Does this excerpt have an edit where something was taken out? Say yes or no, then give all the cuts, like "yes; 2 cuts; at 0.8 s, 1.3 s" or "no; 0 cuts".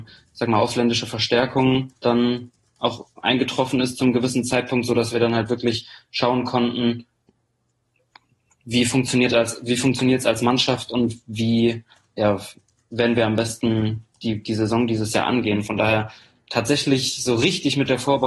yes; 1 cut; at 2.0 s